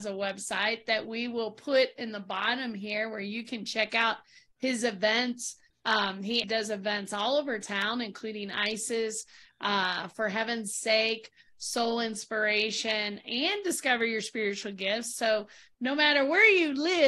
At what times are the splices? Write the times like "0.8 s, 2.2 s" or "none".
6.4 s